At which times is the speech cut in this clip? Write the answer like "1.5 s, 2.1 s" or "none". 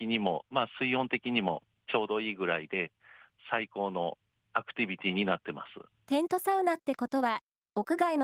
5.9 s